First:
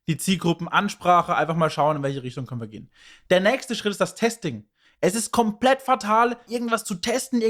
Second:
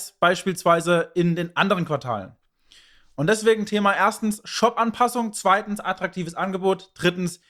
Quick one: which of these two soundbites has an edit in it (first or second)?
first